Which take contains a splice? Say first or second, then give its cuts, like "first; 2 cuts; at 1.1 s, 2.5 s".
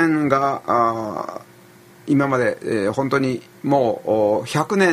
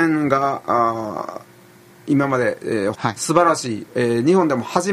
second; 1 cut; at 2.9 s